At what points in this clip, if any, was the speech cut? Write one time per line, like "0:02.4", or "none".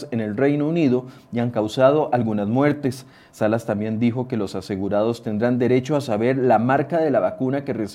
none